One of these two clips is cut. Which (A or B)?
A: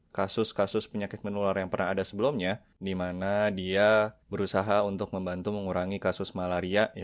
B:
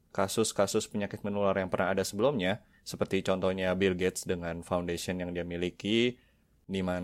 A